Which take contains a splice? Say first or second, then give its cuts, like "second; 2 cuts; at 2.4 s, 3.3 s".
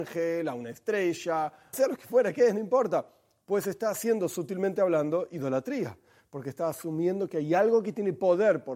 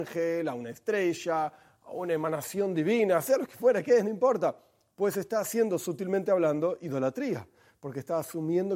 first; 1 cut; at 1.7 s